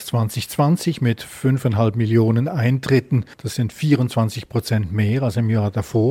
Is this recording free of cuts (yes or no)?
no